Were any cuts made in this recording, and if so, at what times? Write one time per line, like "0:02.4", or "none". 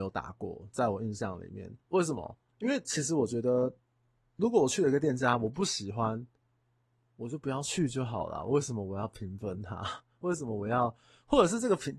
0:01.8